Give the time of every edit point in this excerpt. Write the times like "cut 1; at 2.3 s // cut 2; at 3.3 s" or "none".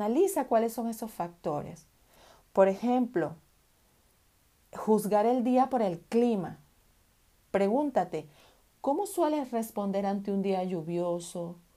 none